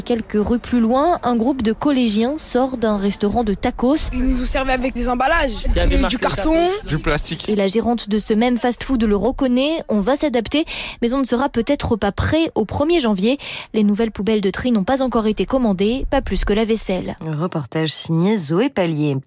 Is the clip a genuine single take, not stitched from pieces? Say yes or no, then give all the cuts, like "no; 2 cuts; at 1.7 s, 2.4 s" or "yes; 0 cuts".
no; 1 cut; at 5.0 s